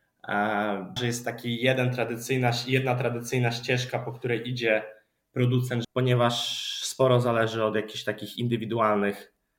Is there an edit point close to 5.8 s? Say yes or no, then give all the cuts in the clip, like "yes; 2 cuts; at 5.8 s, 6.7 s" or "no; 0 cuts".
yes; 2 cuts; at 1.0 s, 5.8 s